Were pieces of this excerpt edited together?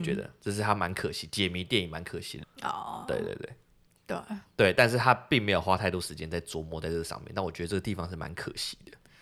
yes; 2 cuts; at 2.4 s, 3.9 s

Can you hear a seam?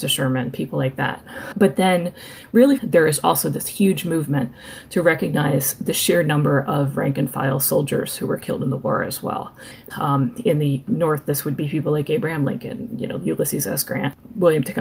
yes; 2 cuts; at 2.8 s, 9.9 s

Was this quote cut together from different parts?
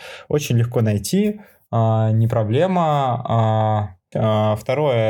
yes; 1 cut; at 4.1 s

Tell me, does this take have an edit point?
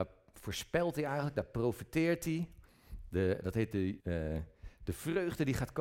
yes; 1 cut; at 4.0 s

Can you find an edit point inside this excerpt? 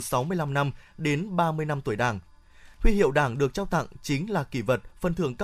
no; 0 cuts

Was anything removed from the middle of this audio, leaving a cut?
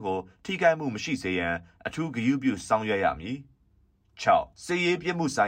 yes; 1 cut; at 4.5 s

